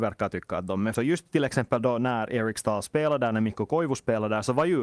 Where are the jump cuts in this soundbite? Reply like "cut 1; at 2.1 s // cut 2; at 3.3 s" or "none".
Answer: cut 1; at 0.9 s